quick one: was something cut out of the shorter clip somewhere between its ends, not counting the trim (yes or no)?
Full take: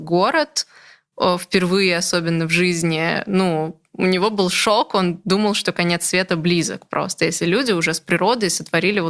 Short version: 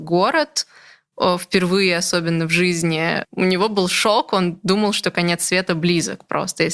yes